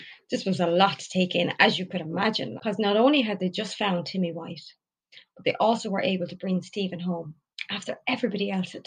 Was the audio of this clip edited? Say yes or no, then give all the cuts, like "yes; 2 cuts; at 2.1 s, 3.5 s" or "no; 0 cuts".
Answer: yes; 1 cut; at 2.6 s